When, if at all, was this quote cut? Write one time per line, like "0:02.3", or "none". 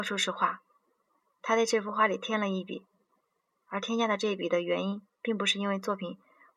0:03.6

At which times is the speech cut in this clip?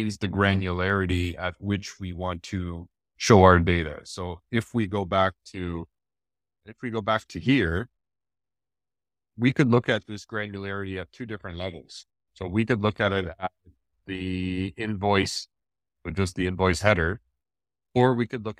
0:15.9

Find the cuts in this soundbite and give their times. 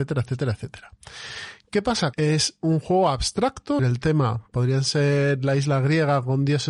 0:02.1
0:03.8

